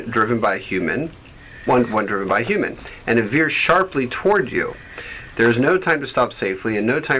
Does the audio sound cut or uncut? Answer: uncut